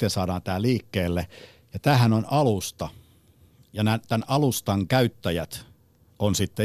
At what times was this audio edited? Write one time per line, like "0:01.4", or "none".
none